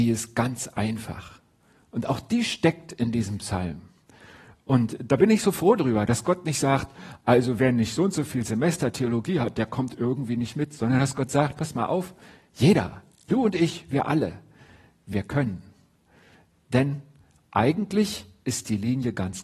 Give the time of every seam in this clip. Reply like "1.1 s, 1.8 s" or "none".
none